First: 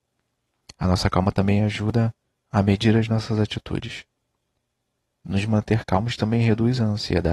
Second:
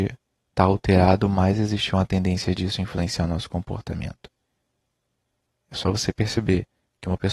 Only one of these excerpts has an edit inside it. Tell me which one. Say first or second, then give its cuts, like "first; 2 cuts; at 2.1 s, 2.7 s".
first; 1 cut; at 5.1 s